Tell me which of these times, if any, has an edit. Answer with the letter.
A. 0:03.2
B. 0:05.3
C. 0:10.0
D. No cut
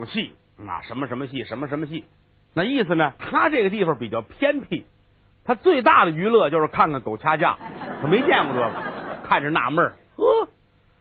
A